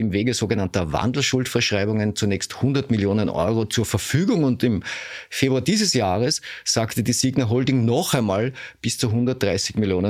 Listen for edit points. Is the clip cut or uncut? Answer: uncut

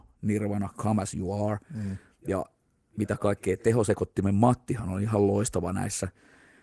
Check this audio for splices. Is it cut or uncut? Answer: uncut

